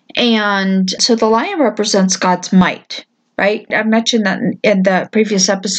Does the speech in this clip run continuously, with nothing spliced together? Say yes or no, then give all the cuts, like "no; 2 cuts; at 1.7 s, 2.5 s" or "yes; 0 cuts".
no; 2 cuts; at 1.0 s, 3.7 s